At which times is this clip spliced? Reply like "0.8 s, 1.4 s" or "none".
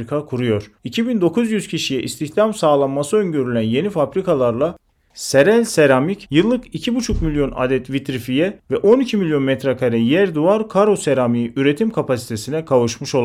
none